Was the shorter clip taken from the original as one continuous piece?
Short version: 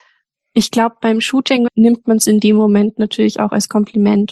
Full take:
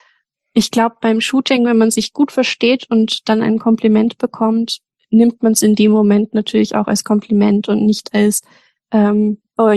no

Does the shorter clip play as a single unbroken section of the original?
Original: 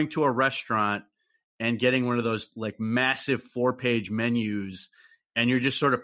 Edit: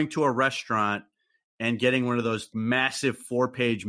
no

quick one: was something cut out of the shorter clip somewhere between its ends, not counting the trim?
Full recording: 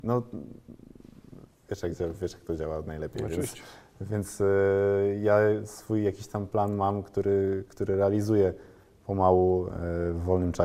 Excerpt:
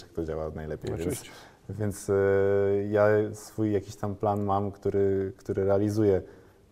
no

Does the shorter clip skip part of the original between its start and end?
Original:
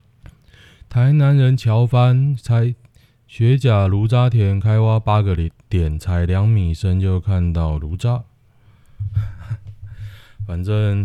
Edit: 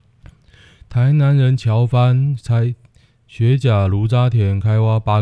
no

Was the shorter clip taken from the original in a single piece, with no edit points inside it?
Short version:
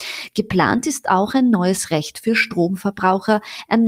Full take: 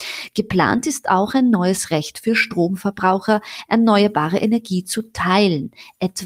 yes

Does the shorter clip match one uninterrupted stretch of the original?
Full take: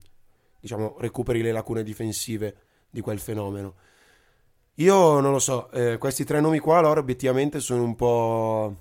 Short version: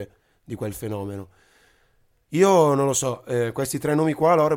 yes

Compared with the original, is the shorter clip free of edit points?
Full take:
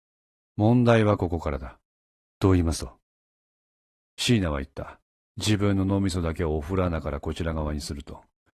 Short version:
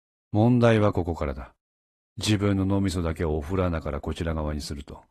no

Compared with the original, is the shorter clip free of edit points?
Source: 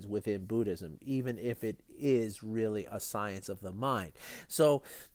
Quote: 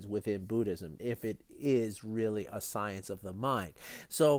no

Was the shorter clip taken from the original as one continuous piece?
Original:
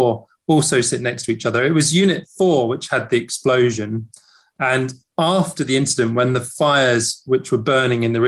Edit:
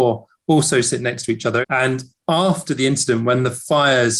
no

